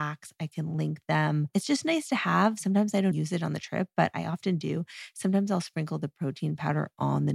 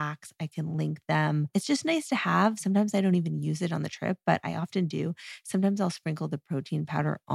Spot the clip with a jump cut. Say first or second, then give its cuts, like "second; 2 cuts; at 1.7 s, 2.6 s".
first; 1 cut; at 3.1 s